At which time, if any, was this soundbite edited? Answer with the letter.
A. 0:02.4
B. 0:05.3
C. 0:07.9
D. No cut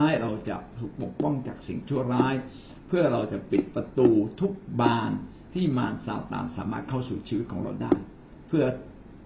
D